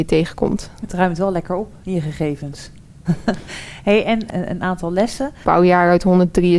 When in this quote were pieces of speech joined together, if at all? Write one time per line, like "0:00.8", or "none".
0:03.0
0:05.4